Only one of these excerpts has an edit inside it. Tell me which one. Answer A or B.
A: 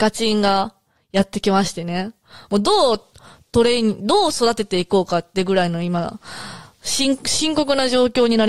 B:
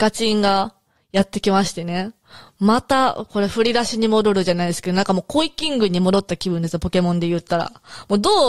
A